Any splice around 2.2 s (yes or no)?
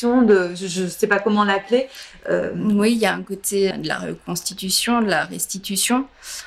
no